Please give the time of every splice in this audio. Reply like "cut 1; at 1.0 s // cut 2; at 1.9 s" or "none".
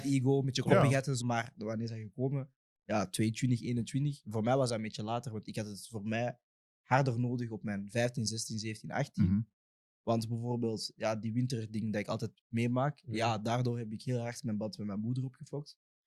cut 1; at 1.2 s